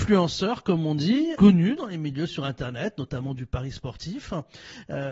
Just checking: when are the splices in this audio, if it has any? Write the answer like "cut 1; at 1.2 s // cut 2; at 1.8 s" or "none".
cut 1; at 1.3 s

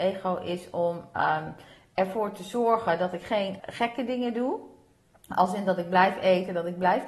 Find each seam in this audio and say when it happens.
cut 1; at 3.6 s

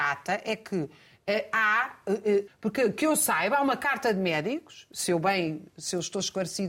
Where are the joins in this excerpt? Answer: cut 1; at 2.5 s

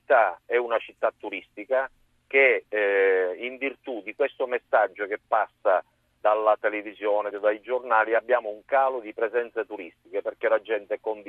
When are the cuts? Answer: cut 1; at 7.3 s

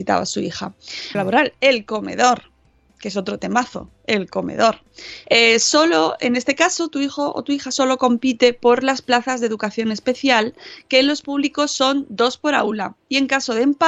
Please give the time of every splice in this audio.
cut 1; at 1.1 s // cut 2; at 5.2 s

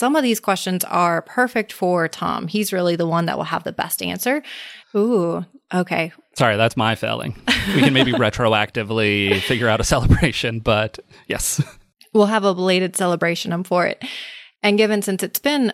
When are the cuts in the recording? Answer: cut 1; at 4.8 s

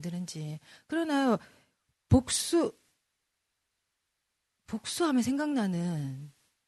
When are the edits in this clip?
none

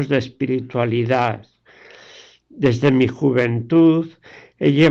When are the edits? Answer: none

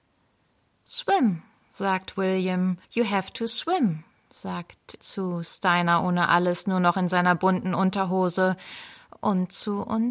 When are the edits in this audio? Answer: cut 1; at 2.8 s // cut 2; at 5.0 s

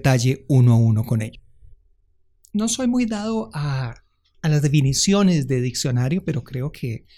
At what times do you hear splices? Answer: none

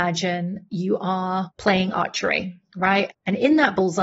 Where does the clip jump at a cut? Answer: cut 1; at 3.1 s

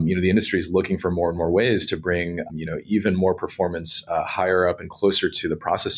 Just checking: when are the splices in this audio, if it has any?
cut 1; at 2.5 s

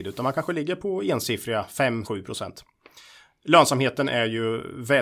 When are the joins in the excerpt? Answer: cut 1; at 2.0 s

